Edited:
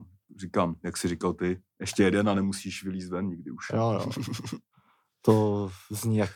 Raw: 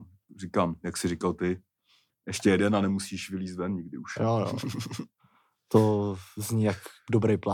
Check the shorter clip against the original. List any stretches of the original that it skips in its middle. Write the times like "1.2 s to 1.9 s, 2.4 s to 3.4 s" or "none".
1.7 s to 2.2 s